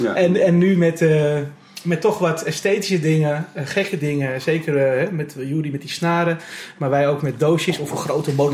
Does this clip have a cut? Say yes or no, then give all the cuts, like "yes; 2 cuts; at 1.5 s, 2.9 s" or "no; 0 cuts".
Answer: no; 0 cuts